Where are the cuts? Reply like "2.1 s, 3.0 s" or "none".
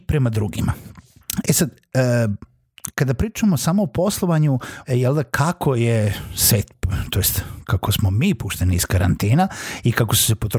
1.4 s, 4.8 s